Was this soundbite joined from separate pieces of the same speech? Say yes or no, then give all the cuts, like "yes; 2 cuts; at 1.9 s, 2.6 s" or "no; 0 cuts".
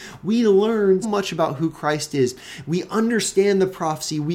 yes; 1 cut; at 1.0 s